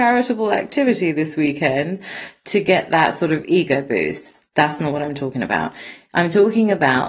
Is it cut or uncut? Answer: uncut